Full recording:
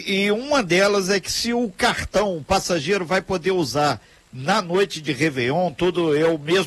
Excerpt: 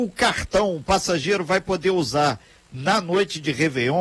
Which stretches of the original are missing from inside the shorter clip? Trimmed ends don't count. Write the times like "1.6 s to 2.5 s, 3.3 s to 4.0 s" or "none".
none